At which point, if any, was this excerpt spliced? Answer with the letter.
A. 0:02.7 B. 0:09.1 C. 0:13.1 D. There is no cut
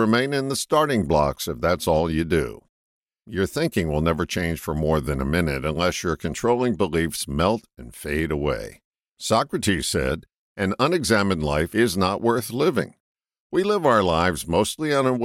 B